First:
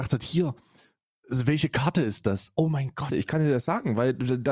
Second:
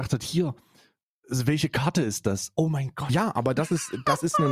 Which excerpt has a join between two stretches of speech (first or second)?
first